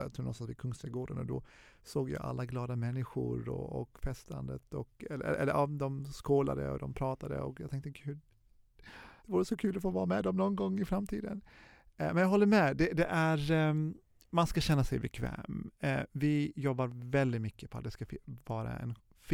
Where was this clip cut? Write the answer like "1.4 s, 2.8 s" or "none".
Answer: 9.2 s